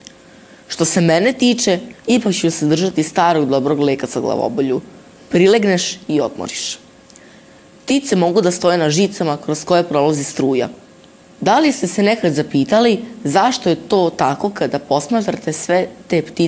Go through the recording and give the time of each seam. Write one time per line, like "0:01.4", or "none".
0:01.9